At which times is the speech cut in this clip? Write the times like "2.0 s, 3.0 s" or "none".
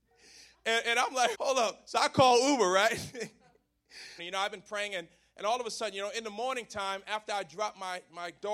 1.3 s, 4.2 s